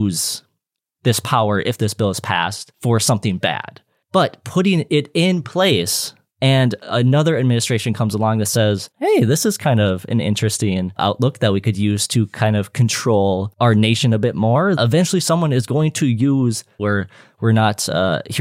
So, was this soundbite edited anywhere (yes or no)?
yes